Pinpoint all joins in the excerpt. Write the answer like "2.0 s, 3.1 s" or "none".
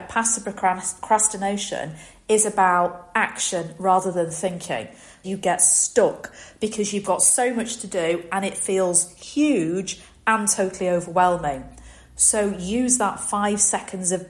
5.2 s

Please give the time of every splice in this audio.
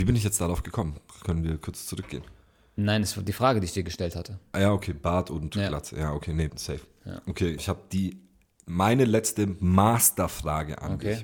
6.5 s, 7.6 s

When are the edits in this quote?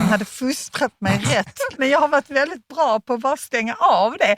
1.7 s

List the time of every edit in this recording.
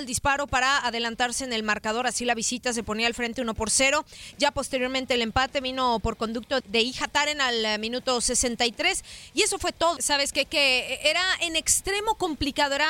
6.6 s, 10.0 s

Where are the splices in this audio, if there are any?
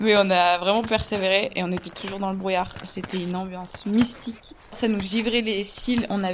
none

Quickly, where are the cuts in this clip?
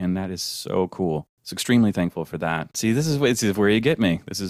1.3 s, 2.7 s

